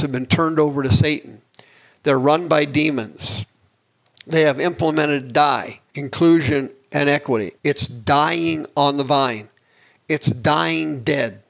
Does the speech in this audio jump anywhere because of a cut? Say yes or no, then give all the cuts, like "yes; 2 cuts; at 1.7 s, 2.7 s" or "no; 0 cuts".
yes; 2 cuts; at 5.9 s, 7.6 s